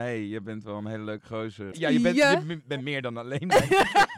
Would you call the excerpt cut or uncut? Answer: cut